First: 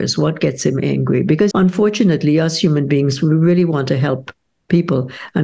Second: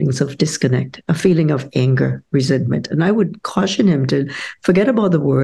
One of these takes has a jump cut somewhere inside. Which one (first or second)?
first